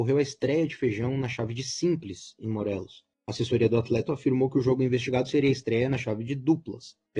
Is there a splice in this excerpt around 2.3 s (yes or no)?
no